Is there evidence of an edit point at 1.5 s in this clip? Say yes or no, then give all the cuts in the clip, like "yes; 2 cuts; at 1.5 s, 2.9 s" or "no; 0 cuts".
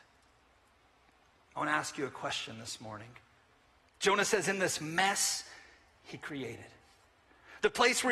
no; 1 cut; at 3.8 s